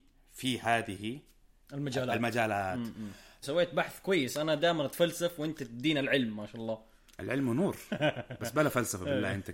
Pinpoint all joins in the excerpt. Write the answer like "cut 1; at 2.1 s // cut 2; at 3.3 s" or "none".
cut 1; at 3.4 s